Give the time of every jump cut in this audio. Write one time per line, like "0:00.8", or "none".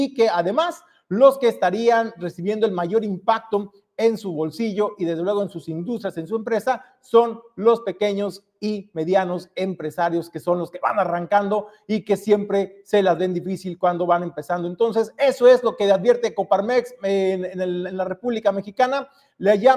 none